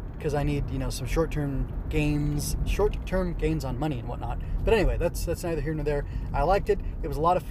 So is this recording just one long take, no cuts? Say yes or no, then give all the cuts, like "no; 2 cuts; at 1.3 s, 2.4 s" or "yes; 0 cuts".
yes; 0 cuts